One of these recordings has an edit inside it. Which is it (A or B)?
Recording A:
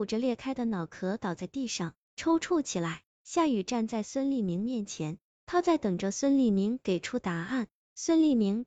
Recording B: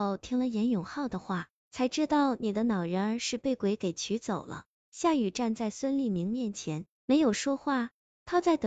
A